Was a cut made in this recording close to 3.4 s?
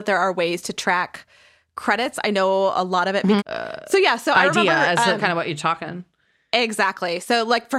yes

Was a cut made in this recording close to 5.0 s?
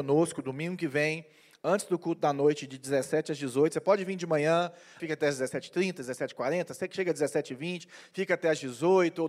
yes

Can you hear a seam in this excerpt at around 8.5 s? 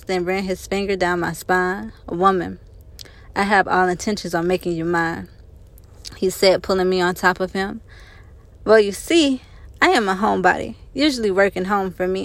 yes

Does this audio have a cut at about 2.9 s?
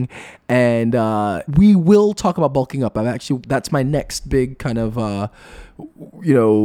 no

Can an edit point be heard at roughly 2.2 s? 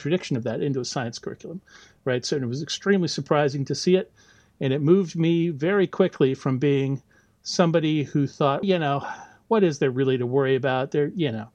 no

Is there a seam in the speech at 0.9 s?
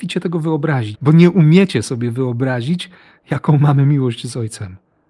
yes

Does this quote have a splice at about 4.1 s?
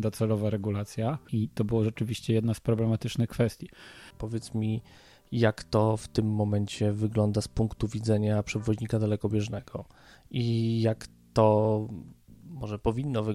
yes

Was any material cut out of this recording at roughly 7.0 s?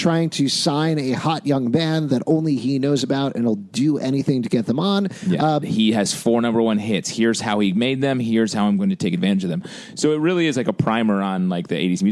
no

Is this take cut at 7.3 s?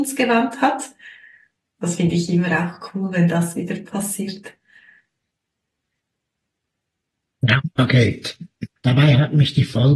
no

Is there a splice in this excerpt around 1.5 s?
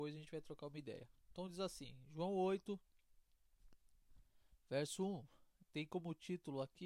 no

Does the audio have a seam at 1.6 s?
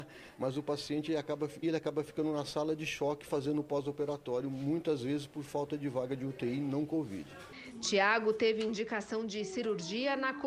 yes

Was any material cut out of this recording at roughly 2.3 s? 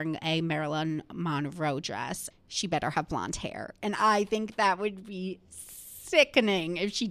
yes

